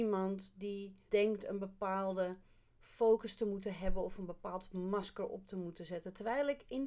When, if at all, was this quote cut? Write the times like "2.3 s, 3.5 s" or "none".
1.1 s